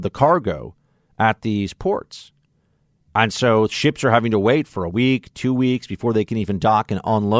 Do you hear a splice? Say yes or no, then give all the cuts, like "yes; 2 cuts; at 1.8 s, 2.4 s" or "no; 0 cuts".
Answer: no; 0 cuts